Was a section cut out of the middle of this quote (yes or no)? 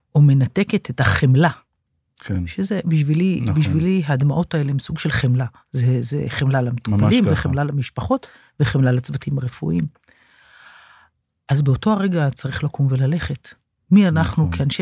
no